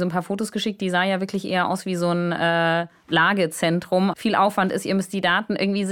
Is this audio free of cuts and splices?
no; 1 cut; at 4.1 s

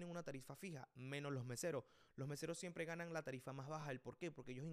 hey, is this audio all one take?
yes; 0 cuts

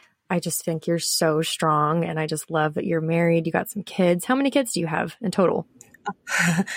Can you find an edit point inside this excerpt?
no; 0 cuts

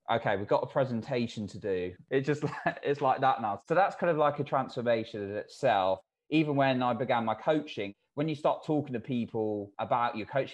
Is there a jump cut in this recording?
yes; 1 cut; at 2.0 s

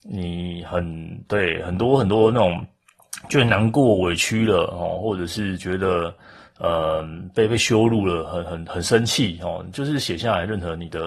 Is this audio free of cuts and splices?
yes; 0 cuts

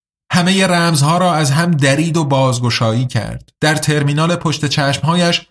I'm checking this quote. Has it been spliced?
yes; 1 cut; at 3.5 s

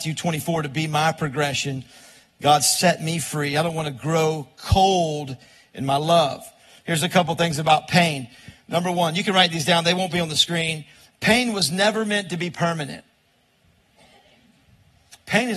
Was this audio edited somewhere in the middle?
no; 0 cuts

